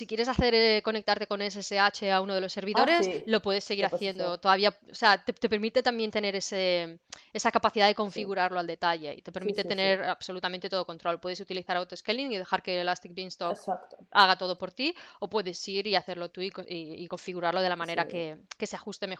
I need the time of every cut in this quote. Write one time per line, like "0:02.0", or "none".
none